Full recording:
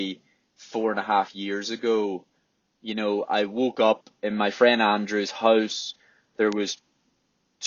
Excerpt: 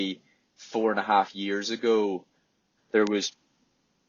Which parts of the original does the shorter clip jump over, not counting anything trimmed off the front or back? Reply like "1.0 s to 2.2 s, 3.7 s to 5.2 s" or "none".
2.8 s to 6.2 s

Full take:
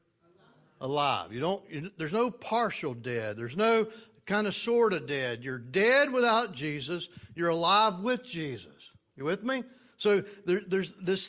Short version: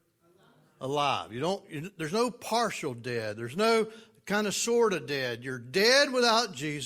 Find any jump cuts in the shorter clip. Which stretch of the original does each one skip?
none

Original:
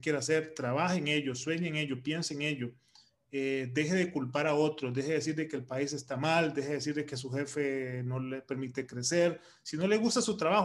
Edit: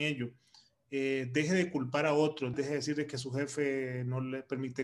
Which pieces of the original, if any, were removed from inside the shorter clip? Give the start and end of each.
4.9 s to 6.5 s

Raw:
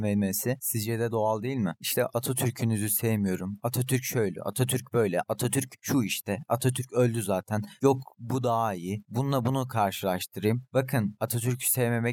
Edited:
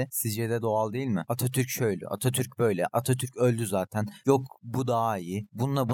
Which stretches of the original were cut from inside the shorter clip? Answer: 1.8 s to 3.6 s, 5.2 s to 6.5 s

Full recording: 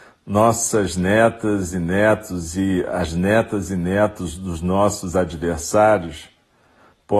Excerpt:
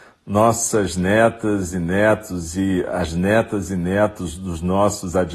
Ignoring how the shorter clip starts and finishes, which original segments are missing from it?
none

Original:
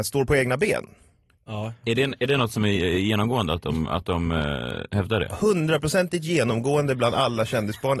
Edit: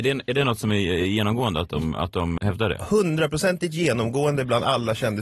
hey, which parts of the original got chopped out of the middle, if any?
4.3 s to 4.9 s

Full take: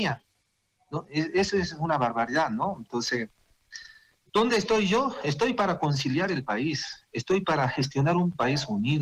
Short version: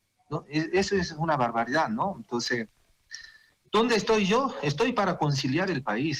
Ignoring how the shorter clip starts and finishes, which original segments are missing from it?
none

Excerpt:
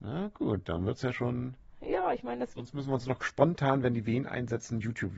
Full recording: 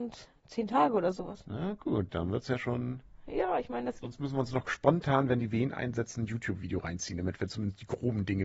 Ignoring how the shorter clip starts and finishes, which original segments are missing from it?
none

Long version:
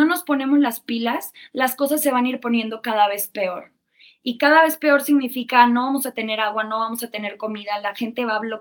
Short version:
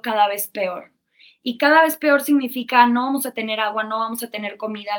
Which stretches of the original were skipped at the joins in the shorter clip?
none

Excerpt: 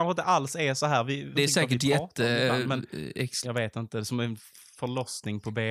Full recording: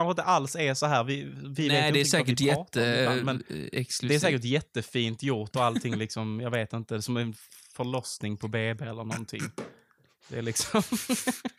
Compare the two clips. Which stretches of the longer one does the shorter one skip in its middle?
1.4 s to 1.9 s, 4.0 s to 6.4 s

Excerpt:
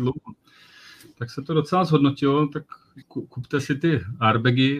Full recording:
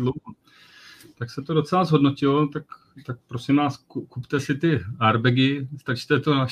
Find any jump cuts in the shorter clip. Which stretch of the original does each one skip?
3.0 s to 3.8 s

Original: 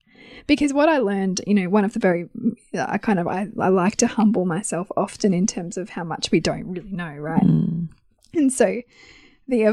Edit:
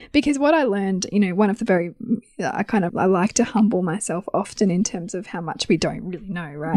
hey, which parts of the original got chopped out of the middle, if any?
3.2 s to 3.5 s

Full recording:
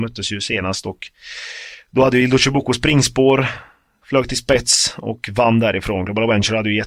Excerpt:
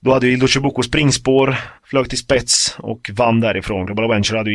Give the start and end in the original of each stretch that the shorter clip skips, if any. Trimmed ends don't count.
3.7 s to 4.0 s

